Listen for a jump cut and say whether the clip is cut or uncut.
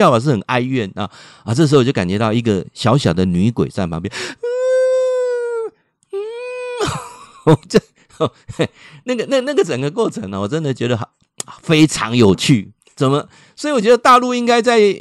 uncut